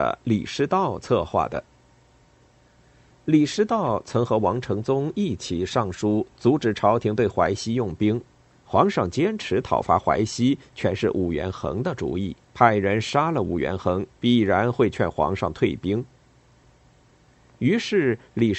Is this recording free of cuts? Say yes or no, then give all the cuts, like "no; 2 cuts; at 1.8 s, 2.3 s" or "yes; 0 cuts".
no; 3 cuts; at 8.5 s, 12.4 s, 14.2 s